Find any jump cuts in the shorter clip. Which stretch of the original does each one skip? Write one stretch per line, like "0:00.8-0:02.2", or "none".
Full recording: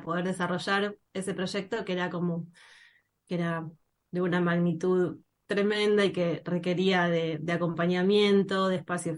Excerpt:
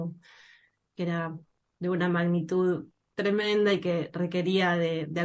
none